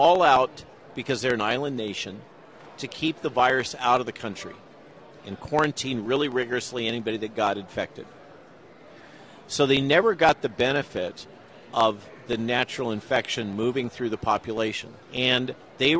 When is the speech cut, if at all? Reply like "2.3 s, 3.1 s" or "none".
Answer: 15.0 s